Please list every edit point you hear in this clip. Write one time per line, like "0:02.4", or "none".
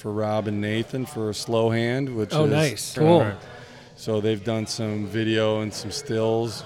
0:03.0